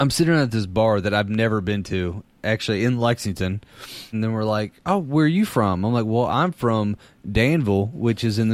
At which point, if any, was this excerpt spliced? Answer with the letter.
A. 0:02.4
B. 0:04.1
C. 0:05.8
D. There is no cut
B